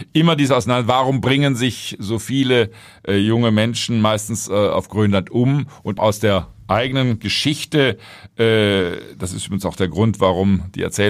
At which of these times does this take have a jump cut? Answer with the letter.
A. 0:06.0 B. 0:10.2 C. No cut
A